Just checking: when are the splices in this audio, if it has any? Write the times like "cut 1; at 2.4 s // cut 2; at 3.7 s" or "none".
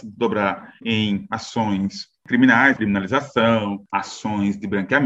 cut 1; at 2.8 s // cut 2; at 3.9 s